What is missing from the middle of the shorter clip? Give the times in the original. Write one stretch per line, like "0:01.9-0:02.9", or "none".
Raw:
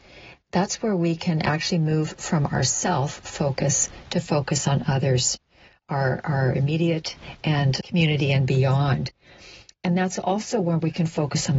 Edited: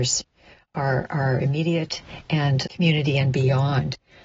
none